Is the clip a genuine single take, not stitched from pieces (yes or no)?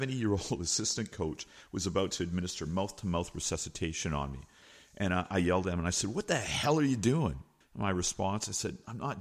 no